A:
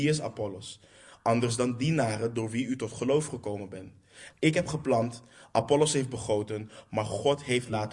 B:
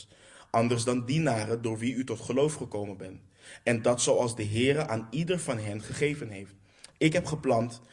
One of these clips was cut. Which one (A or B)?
A